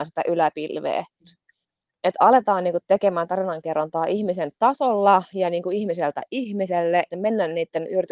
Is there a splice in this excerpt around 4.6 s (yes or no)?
no